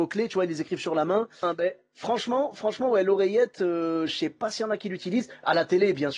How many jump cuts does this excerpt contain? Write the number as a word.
one